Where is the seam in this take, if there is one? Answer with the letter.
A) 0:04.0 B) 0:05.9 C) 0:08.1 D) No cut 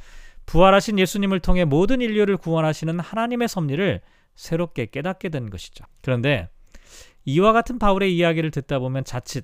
B